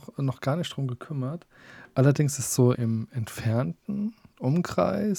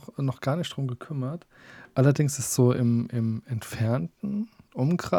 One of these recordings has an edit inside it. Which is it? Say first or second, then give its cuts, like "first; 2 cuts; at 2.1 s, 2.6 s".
first; 1 cut; at 2.7 s